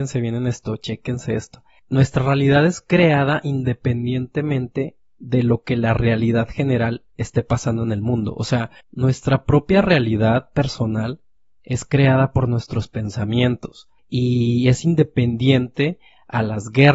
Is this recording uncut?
no; 1 cut; at 8.8 s

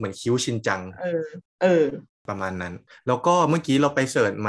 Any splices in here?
no; 0 cuts

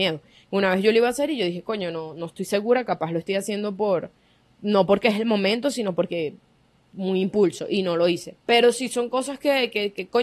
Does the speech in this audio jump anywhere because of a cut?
yes; 1 cut; at 8.4 s

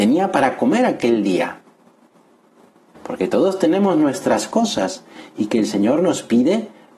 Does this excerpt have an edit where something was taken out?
yes; 1 cut; at 2.9 s

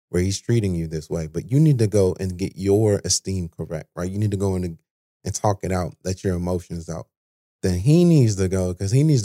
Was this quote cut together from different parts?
no; 0 cuts

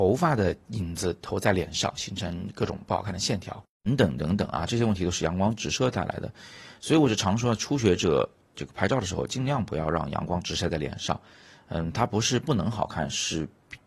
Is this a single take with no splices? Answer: no; 1 cut; at 3.7 s

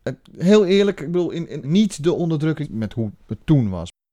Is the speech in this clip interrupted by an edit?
yes; 2 cuts; at 1.6 s, 2.6 s

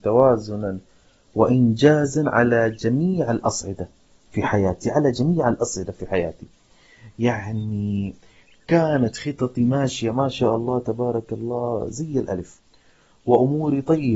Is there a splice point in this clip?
no; 0 cuts

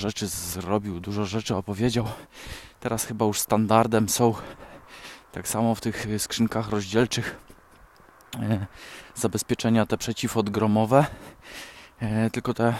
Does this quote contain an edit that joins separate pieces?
no; 0 cuts

